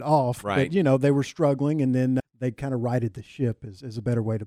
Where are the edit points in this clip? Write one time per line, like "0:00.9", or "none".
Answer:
0:02.2